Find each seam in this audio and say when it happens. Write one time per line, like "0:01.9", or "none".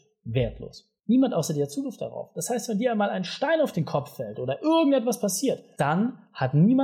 0:01.0